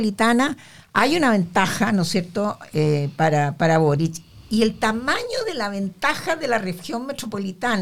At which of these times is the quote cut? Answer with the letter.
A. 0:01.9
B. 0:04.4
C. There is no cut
C